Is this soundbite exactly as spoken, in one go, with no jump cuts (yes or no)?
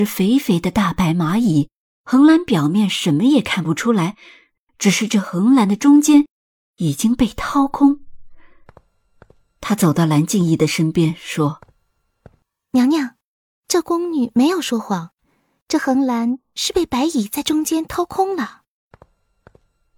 yes